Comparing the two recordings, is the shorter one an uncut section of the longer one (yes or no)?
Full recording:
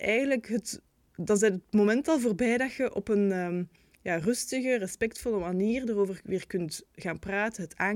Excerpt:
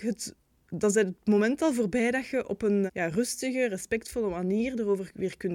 no